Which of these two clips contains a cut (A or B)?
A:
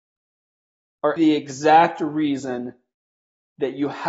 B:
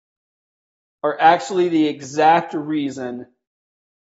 A